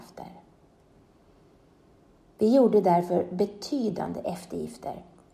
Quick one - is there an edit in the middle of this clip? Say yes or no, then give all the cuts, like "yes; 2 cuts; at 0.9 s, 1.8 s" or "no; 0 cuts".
no; 0 cuts